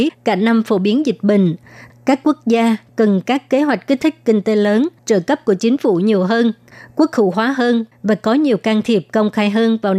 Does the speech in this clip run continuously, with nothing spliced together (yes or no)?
no